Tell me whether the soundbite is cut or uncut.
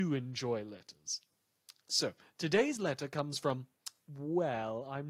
uncut